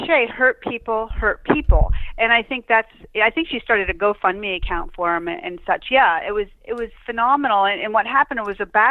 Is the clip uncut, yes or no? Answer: yes